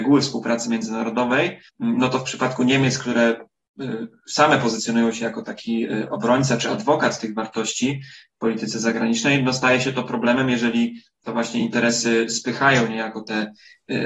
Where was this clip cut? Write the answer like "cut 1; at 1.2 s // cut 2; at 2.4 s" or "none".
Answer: cut 1; at 1.7 s

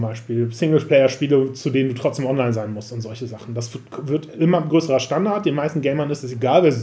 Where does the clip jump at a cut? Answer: none

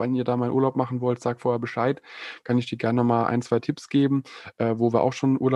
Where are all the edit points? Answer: none

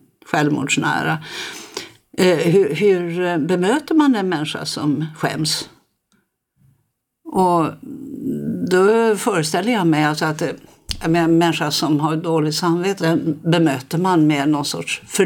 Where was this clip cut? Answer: cut 1; at 13.0 s

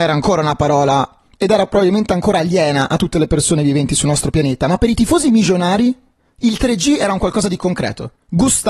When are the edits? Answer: none

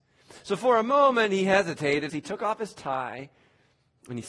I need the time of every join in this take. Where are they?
cut 1; at 2.1 s

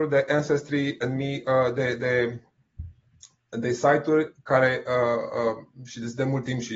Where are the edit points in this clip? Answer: none

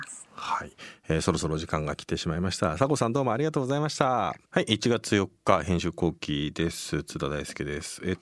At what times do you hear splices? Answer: cut 1; at 4.4 s

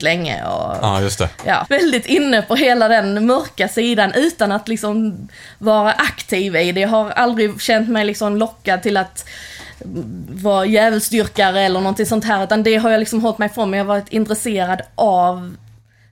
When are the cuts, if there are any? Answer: cut 1; at 1.7 s

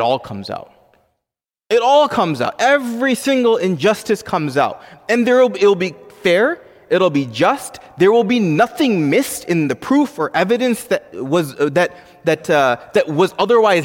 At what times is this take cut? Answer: none

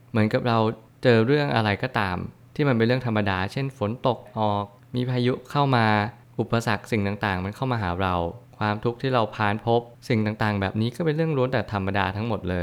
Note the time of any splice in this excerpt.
cut 1; at 4.3 s

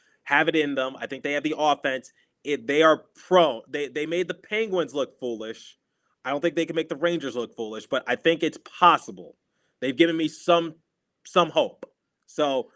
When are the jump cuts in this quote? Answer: none

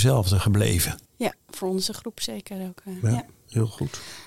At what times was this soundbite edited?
cut 1; at 1.0 s

